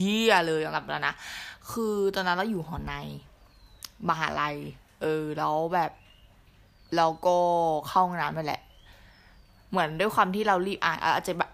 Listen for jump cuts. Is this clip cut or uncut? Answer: uncut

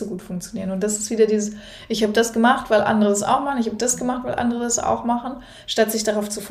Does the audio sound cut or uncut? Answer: uncut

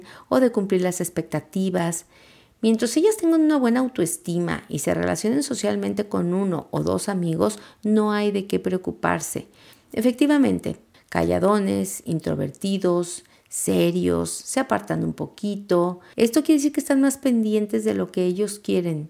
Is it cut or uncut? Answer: cut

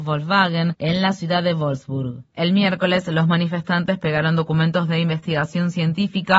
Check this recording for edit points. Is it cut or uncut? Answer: uncut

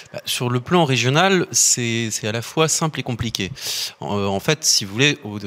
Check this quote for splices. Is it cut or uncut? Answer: uncut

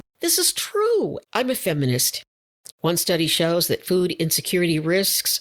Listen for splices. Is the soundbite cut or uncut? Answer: cut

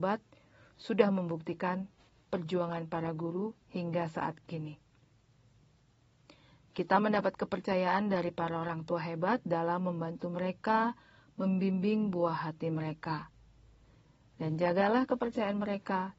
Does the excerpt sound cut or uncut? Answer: uncut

